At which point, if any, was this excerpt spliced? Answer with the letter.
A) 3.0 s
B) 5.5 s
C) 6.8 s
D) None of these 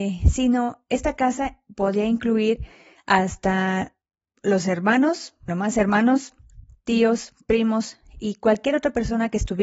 B